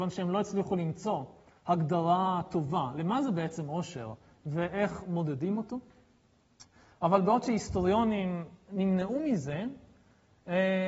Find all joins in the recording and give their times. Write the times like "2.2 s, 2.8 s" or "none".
none